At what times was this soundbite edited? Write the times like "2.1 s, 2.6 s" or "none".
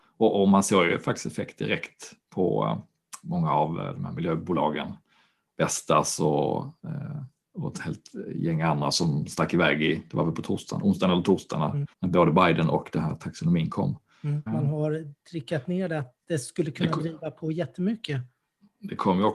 11.9 s, 14.5 s